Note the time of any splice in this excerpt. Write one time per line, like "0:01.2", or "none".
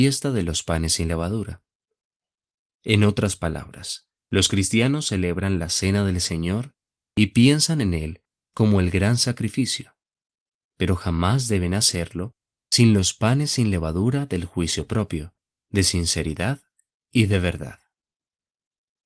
0:04.2